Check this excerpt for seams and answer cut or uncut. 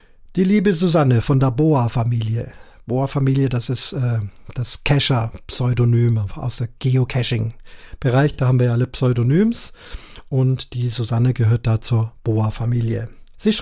uncut